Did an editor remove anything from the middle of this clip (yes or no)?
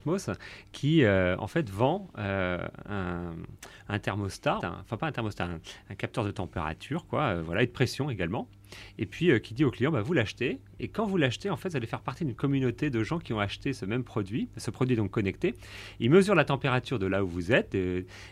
yes